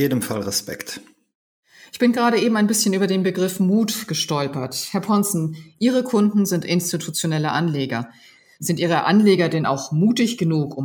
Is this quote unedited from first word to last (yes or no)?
yes